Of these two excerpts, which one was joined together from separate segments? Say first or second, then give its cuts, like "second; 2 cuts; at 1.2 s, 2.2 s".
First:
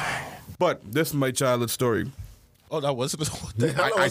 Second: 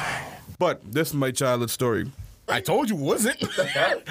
second; 1 cut; at 2.5 s